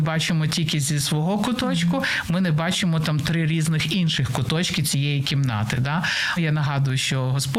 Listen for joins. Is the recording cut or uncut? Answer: cut